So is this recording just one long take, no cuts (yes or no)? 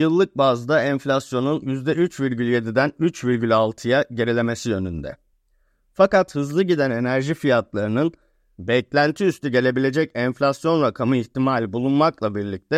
yes